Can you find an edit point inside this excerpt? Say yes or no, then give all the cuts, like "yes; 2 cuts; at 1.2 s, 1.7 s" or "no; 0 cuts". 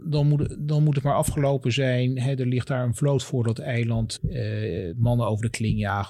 yes; 1 cut; at 4.2 s